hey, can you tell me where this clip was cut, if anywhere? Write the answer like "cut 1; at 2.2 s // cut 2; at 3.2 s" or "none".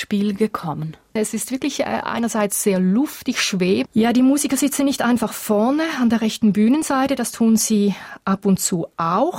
cut 1; at 1.2 s // cut 2; at 3.9 s